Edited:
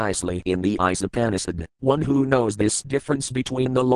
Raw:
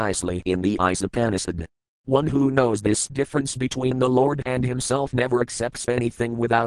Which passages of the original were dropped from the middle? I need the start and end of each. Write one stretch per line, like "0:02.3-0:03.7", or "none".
0:01.7-0:02.0